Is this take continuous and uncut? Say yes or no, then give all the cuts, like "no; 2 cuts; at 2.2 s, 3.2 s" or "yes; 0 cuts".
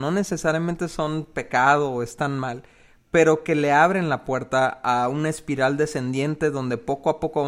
yes; 0 cuts